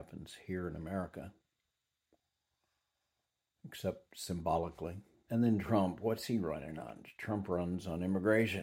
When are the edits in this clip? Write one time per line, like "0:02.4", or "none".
0:05.3